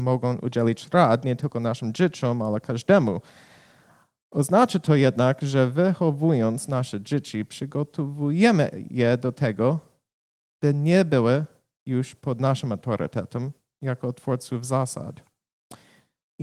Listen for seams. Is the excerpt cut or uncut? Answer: uncut